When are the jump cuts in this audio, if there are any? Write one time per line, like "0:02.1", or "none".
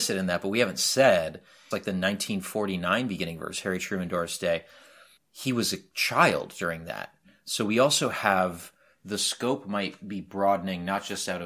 0:01.7